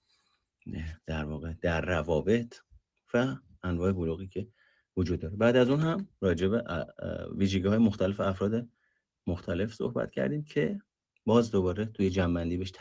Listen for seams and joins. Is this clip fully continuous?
yes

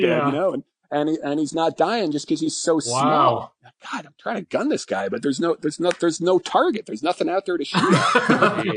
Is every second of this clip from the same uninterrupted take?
yes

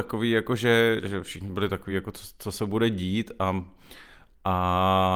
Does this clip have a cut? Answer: no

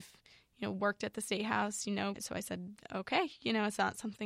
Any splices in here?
yes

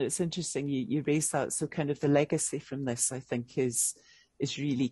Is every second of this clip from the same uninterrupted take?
yes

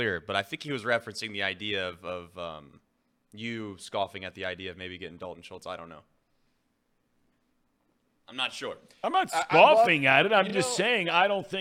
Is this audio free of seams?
yes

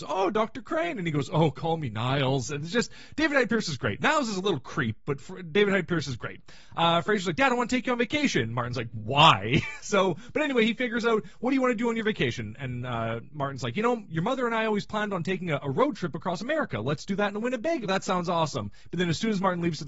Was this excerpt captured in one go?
no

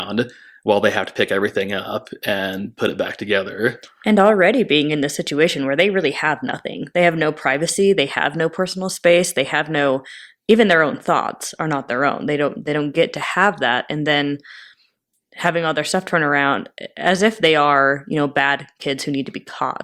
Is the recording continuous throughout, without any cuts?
yes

